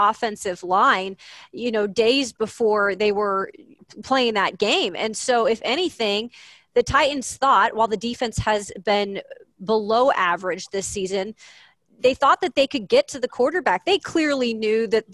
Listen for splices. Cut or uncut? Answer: cut